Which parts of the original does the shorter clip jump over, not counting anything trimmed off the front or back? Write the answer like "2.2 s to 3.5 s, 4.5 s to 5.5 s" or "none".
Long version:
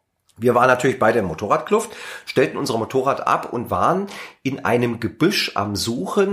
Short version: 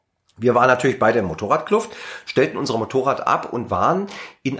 none